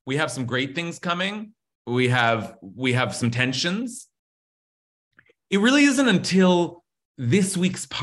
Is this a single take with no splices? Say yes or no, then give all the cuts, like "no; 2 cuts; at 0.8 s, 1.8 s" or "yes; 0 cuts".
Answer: yes; 0 cuts